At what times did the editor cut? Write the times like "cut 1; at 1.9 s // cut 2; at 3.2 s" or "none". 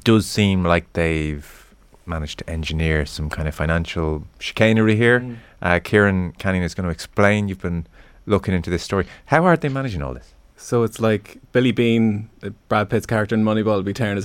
none